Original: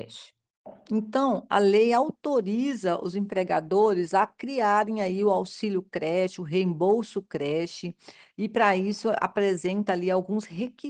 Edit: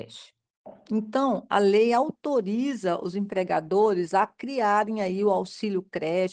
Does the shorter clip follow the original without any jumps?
yes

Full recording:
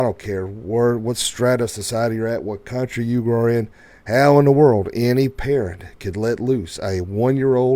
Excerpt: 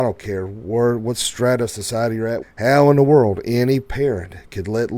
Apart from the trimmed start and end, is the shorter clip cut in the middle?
yes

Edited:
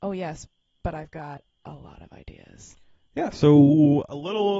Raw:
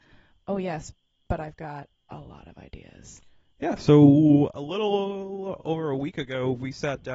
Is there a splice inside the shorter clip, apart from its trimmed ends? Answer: no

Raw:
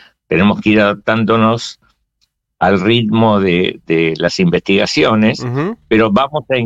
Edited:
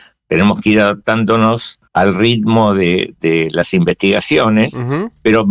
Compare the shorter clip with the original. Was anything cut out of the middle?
yes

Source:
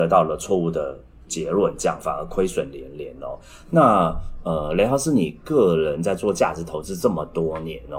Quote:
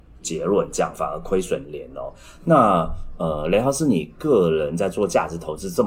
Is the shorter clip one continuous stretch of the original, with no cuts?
no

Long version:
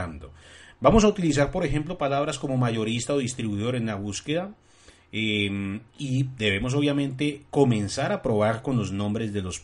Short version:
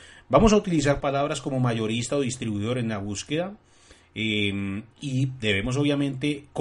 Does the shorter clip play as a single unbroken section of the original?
no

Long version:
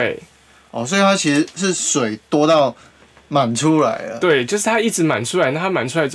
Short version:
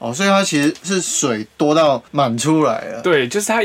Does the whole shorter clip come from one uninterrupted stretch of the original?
no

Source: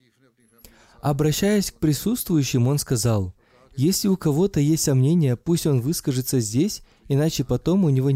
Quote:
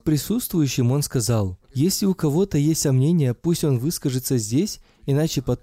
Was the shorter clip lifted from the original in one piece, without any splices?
no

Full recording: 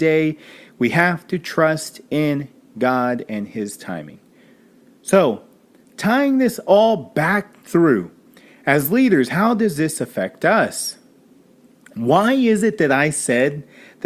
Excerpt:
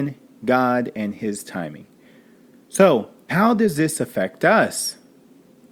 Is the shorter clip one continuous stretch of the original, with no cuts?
no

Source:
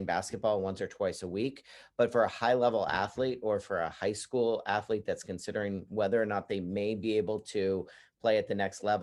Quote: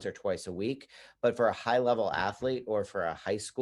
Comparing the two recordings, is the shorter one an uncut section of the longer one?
yes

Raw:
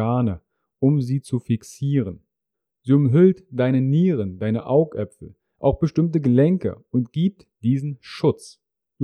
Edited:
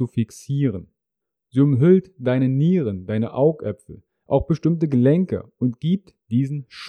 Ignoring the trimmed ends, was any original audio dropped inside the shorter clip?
no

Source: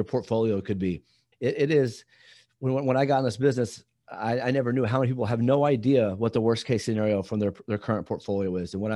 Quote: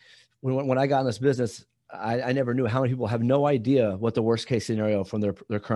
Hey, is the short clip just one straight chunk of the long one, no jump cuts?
yes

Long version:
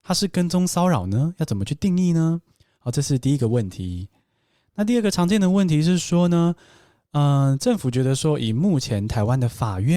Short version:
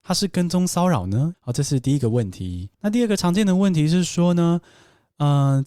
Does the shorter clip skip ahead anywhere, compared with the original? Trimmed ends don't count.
yes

